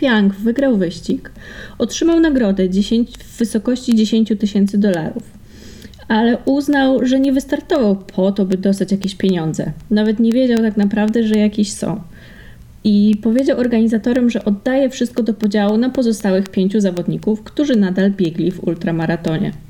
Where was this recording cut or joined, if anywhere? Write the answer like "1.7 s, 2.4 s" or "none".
none